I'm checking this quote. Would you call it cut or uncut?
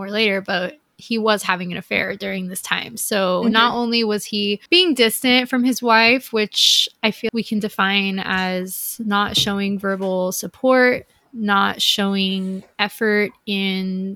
cut